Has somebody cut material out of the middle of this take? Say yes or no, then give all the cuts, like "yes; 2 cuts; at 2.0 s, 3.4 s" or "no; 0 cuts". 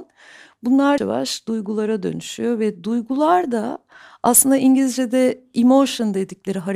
yes; 1 cut; at 1.0 s